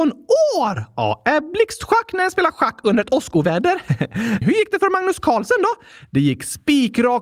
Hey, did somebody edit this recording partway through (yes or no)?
yes